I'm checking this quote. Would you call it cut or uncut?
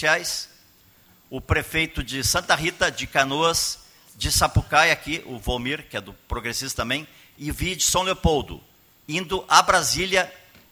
uncut